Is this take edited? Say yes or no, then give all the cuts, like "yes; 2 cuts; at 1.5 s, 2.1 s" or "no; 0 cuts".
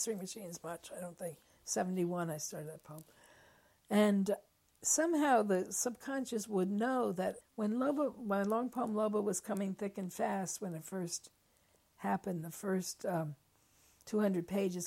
yes; 1 cut; at 7.4 s